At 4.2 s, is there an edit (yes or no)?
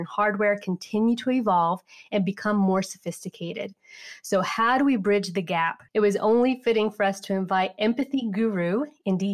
no